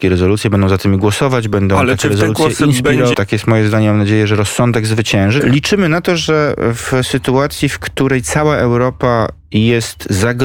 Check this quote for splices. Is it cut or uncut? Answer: cut